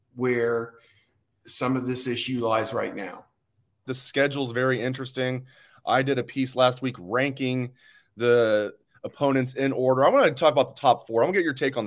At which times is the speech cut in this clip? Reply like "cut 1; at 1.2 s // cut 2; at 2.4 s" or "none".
cut 1; at 3.8 s